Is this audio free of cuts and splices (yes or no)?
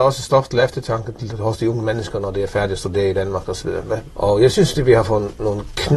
no